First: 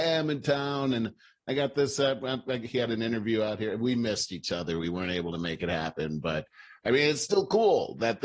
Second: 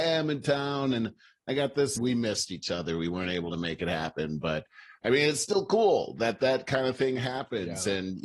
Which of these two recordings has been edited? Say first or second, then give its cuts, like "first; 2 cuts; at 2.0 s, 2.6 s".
second; 1 cut; at 2.0 s